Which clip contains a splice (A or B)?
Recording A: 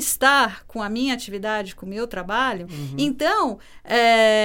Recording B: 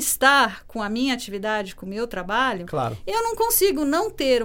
A